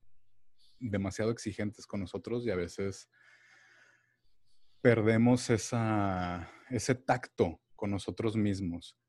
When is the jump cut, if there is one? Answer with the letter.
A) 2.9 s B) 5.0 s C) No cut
C